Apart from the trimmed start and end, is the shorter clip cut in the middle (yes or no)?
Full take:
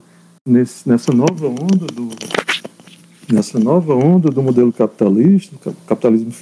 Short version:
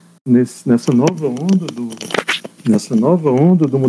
yes